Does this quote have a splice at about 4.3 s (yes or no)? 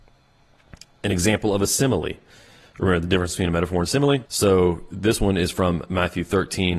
yes